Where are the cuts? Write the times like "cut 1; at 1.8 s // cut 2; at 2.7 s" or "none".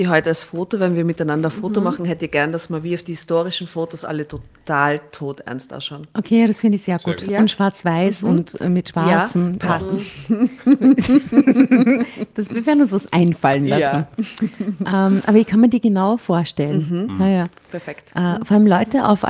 cut 1; at 9.8 s